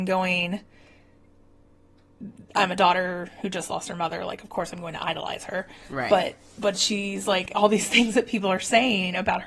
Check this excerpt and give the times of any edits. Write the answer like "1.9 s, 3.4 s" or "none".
none